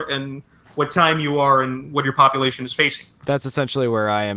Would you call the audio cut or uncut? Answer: uncut